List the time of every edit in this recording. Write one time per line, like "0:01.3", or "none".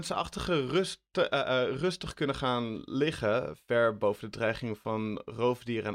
none